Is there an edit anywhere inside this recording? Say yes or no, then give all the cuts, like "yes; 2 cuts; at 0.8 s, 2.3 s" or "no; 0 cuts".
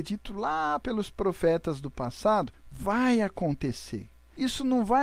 no; 0 cuts